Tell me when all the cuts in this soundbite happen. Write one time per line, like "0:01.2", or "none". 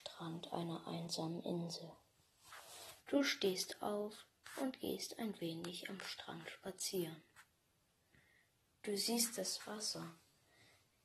0:03.0